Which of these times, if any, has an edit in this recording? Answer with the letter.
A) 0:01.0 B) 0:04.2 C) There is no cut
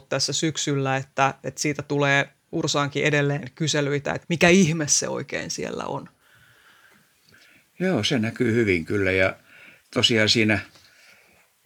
B